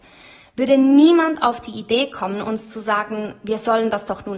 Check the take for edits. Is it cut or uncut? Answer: uncut